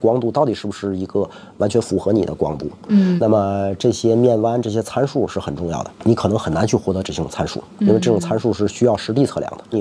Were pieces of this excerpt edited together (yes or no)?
yes